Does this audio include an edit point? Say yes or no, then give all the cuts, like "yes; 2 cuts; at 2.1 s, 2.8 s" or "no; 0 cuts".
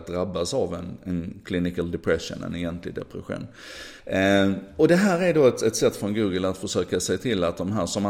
yes; 1 cut; at 4.0 s